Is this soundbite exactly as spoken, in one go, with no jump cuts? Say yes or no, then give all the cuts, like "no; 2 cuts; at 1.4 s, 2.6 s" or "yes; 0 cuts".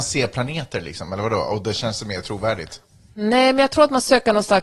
yes; 0 cuts